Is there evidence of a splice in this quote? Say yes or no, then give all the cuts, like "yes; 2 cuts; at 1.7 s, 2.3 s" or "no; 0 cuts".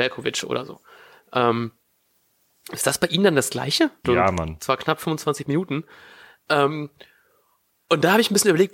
yes; 1 cut; at 4.0 s